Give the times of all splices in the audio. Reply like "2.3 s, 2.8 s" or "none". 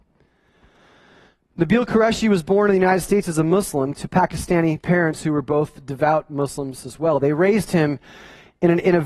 none